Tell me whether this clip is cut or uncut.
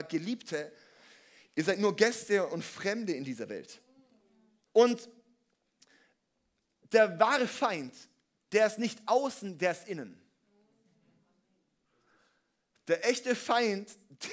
cut